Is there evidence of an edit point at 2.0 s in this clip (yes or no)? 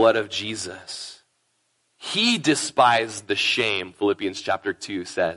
yes